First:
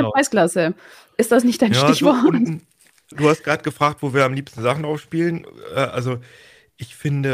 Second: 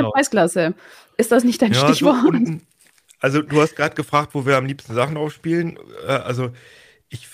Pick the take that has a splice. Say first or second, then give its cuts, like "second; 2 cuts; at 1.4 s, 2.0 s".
first; 1 cut; at 3.1 s